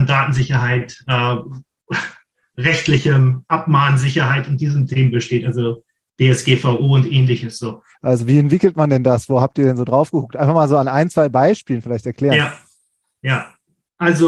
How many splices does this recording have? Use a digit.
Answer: 1